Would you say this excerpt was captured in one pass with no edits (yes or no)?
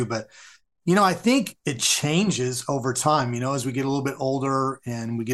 yes